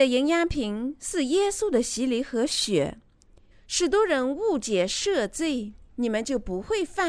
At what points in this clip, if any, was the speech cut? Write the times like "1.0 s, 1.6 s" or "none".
3.5 s, 5.9 s